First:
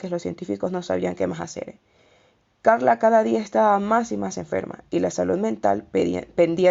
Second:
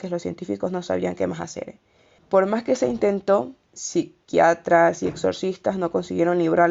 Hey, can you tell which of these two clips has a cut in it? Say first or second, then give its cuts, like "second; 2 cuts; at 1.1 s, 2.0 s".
second; 2 cuts; at 2.2 s, 3.7 s